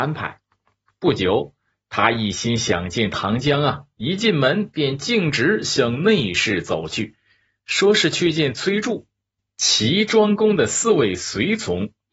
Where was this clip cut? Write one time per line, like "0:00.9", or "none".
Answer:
0:01.7